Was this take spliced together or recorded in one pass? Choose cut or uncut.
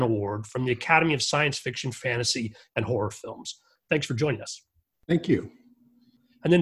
cut